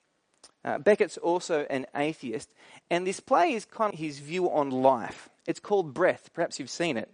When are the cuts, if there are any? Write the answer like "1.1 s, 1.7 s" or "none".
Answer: 3.9 s, 5.4 s